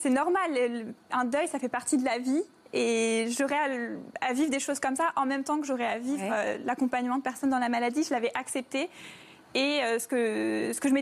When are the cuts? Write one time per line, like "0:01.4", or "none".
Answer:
none